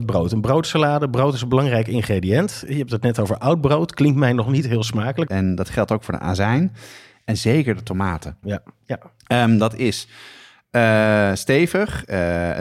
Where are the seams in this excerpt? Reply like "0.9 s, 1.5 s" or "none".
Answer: 5.3 s, 8.4 s